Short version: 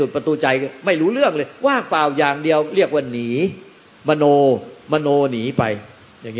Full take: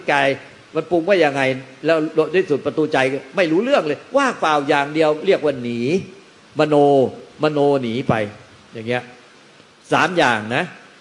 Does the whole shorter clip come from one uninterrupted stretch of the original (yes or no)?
yes